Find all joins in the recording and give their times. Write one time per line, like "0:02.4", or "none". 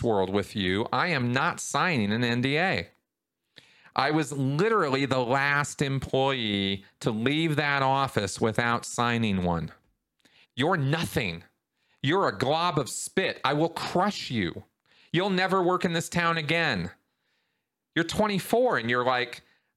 0:10.4